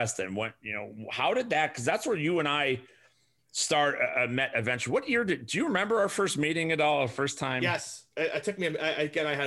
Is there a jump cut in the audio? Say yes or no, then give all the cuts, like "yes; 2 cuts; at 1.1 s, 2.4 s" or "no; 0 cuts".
no; 0 cuts